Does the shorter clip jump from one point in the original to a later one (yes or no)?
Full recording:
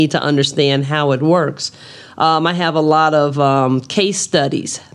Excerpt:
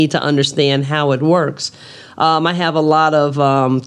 no